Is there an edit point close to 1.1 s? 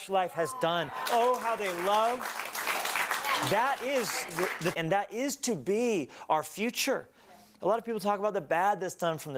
yes; 2 cuts; at 1.1 s, 4.7 s

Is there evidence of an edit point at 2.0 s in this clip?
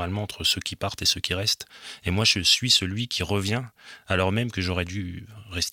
no; 0 cuts

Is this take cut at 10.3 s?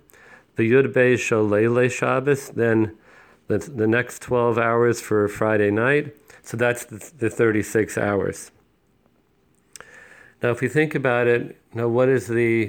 no; 1 cut; at 6.4 s

